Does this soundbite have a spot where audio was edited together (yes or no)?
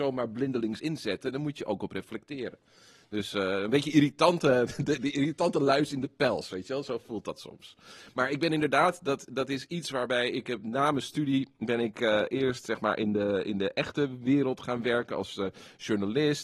no